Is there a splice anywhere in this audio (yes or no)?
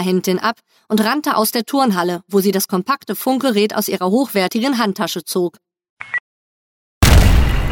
no